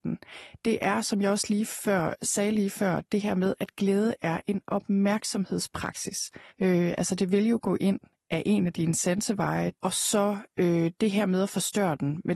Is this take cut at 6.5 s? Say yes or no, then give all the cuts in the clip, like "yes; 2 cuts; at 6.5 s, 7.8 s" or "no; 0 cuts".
yes; 2 cuts; at 6.5 s, 9.8 s